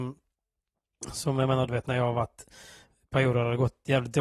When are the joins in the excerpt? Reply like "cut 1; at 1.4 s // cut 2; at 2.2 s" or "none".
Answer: cut 1; at 1.7 s